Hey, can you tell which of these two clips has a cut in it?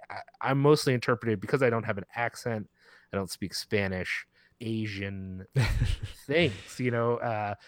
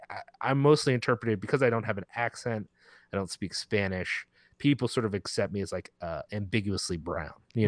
first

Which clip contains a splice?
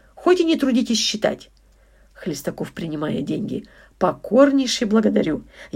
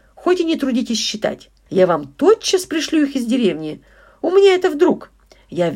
second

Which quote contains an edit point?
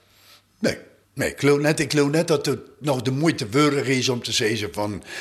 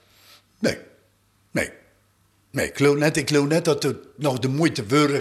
first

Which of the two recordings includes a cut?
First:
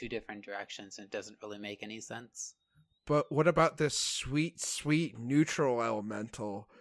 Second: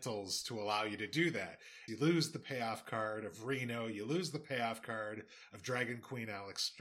second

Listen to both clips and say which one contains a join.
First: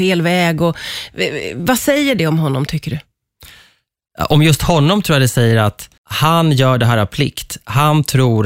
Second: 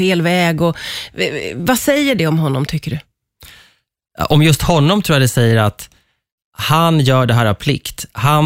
first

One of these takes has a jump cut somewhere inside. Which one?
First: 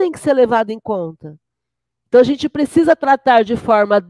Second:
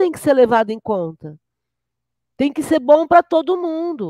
first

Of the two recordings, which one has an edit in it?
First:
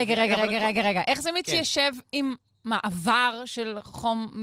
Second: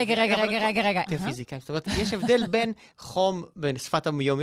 second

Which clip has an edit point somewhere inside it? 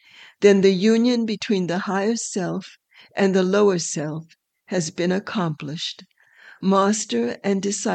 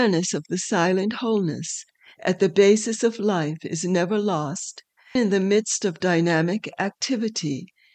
second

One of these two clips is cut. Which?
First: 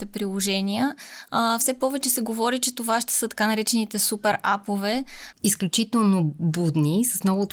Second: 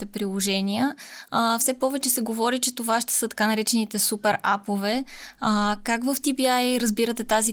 first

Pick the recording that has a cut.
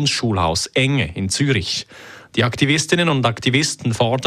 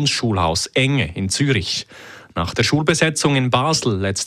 first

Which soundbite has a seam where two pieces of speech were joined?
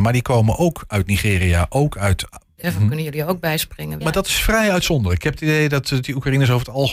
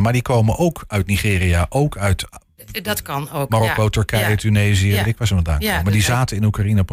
first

